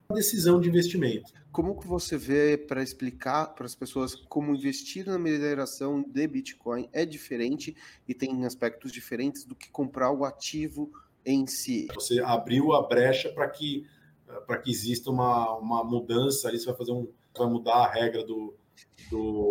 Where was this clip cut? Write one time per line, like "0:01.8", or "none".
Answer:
0:12.0
0:17.4